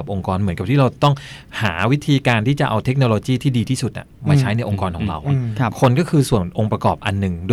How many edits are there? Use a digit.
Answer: 0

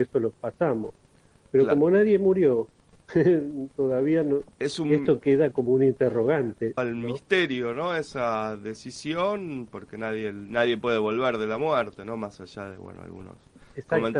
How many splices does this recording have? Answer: 1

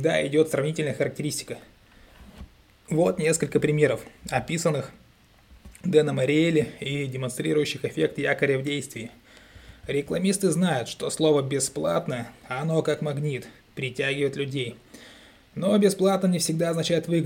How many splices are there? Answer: 0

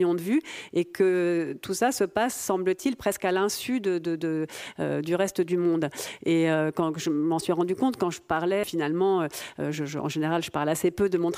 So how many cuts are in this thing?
1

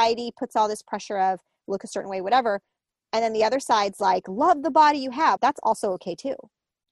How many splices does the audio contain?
1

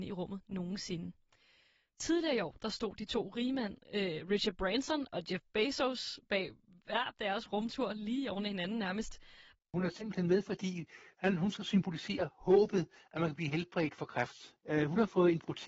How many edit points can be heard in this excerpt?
1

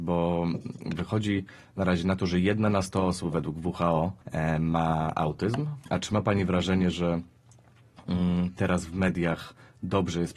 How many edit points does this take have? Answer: 2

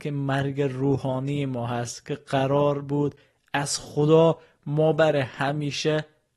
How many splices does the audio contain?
0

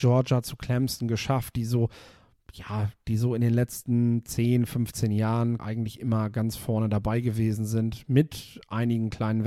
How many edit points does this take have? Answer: 1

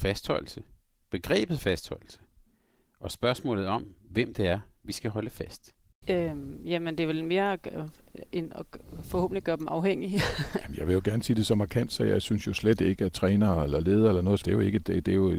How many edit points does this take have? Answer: 2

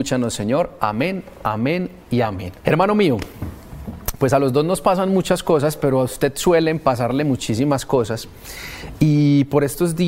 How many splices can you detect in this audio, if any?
1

